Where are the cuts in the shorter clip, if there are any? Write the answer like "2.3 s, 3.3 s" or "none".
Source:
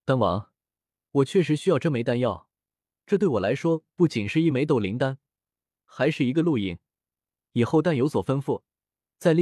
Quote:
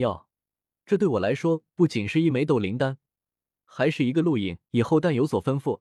4.6 s